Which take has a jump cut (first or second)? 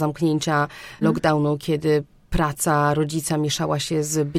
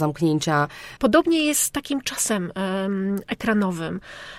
second